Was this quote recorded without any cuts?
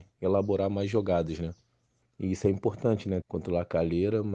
no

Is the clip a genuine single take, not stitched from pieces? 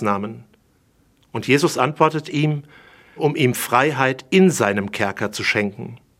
no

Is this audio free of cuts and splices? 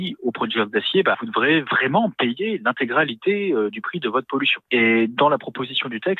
no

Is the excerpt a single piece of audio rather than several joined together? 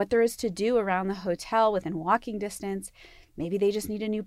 yes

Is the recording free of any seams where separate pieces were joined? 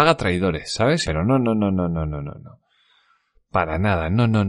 no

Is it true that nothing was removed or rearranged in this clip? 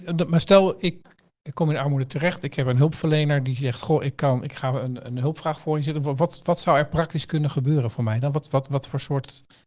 yes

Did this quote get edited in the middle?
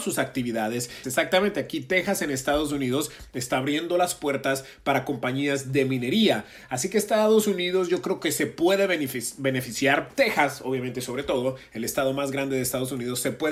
yes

